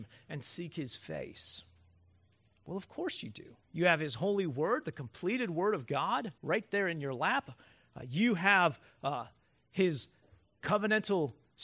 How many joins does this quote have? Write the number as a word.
two